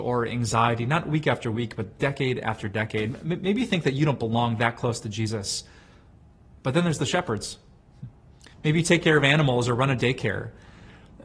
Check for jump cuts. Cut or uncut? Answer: cut